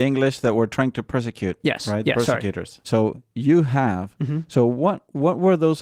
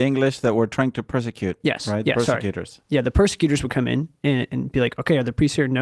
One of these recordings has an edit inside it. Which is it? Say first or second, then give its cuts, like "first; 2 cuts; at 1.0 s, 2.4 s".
first; 1 cut; at 2.8 s